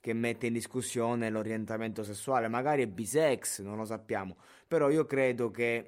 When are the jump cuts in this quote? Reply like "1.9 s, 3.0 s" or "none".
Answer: none